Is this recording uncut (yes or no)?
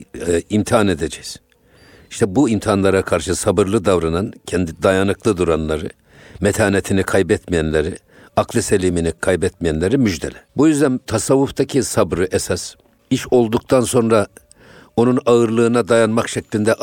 yes